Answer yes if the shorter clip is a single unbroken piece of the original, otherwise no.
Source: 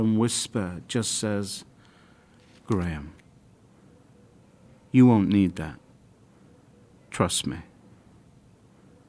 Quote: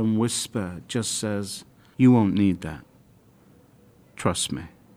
no